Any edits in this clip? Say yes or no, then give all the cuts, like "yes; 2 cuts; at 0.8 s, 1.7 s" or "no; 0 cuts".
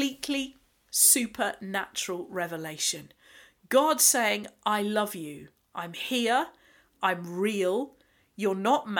no; 0 cuts